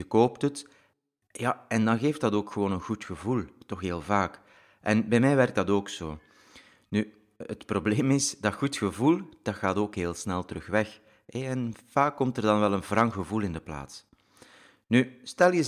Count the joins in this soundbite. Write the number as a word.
zero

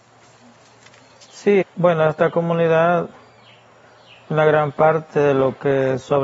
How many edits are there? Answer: one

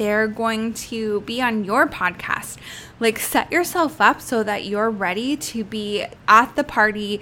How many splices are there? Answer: one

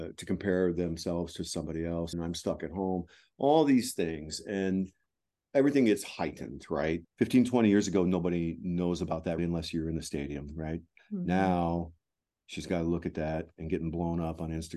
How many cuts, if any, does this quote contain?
three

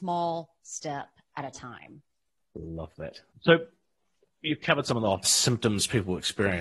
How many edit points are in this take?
two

